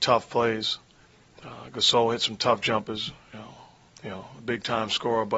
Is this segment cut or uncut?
cut